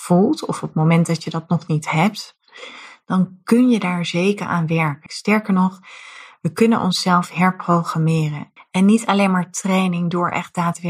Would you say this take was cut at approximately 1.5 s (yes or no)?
no